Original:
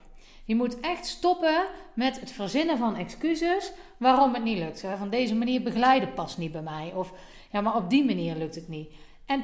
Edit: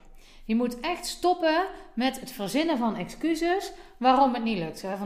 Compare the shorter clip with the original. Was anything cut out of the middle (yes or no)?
no